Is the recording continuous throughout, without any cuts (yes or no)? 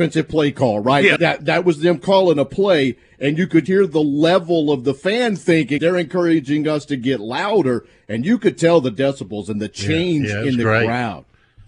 no